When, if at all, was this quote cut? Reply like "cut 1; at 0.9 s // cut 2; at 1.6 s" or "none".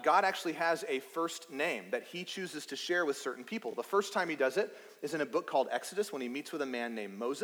none